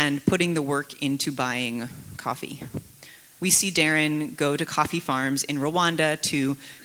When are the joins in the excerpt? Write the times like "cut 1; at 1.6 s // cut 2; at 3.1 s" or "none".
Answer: cut 1; at 3.4 s